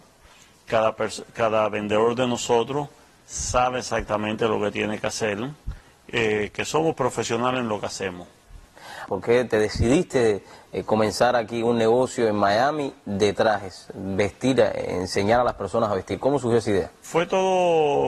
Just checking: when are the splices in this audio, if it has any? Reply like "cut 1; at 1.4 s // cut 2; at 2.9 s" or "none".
cut 1; at 9.1 s